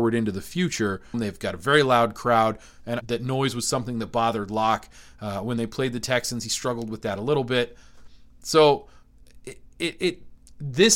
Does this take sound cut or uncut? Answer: cut